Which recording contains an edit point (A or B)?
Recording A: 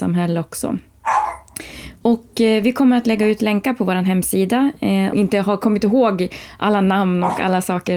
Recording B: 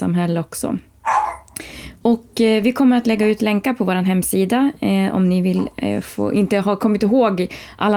A